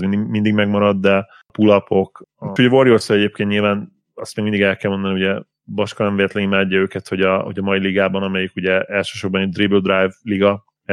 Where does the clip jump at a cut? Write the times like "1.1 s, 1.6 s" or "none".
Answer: 2.6 s